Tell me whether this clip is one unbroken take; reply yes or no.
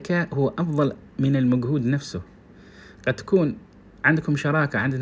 yes